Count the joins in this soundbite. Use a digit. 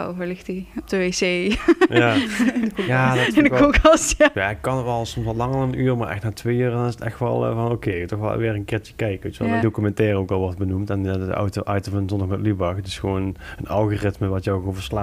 2